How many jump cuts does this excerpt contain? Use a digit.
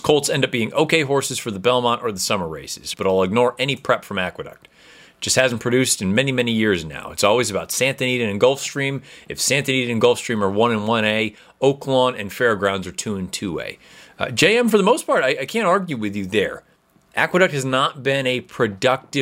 1